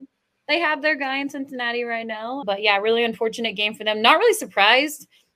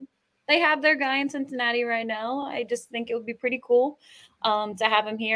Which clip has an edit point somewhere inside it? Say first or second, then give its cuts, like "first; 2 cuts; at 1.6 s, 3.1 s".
first; 1 cut; at 2.4 s